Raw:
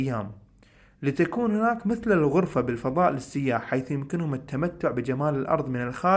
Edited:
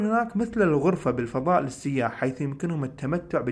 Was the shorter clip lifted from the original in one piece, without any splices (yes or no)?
yes